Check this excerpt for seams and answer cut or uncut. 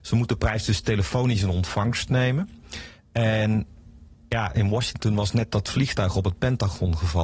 uncut